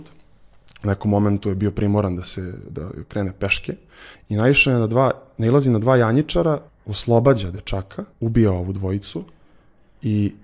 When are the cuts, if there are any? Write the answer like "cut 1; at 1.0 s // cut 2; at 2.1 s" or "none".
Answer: cut 1; at 4.1 s // cut 2; at 6.7 s // cut 3; at 8.1 s